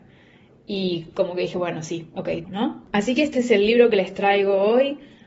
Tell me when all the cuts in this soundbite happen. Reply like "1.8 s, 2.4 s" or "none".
2.4 s